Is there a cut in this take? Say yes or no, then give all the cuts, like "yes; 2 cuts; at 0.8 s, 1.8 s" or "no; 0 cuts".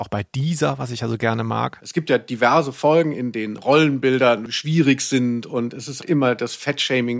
yes; 2 cuts; at 1.8 s, 6.0 s